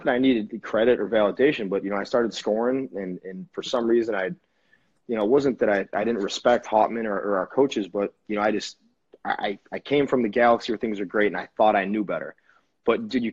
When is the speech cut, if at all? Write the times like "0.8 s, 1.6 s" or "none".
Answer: none